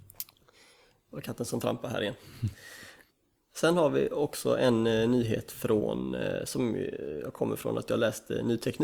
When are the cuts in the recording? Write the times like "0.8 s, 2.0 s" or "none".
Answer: none